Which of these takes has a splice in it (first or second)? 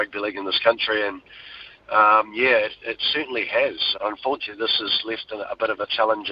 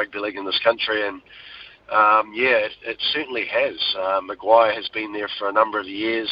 first